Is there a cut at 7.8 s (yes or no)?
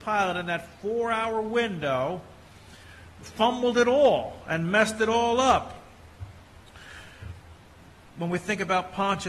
no